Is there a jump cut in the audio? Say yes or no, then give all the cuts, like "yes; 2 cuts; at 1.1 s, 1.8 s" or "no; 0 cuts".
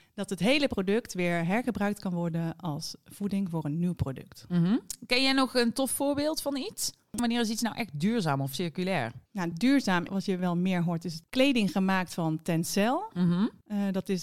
no; 0 cuts